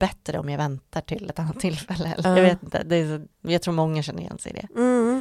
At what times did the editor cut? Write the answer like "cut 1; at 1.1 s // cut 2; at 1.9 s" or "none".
cut 1; at 2.2 s // cut 2; at 3.3 s